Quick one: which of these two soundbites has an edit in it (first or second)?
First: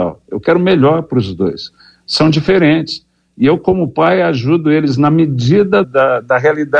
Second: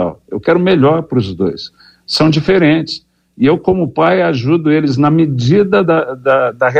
first